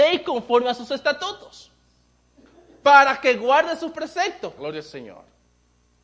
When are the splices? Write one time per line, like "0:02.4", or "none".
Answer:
0:04.6